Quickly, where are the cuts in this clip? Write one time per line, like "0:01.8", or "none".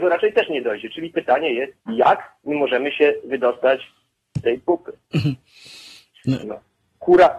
0:01.8
0:06.4